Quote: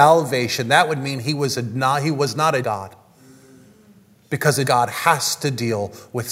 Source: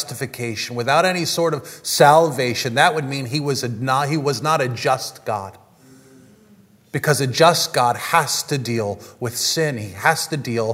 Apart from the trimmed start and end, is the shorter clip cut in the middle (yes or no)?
yes